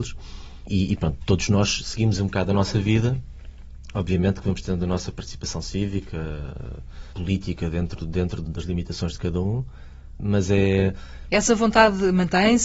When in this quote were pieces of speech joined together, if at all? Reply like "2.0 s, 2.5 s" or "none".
8.5 s, 11.3 s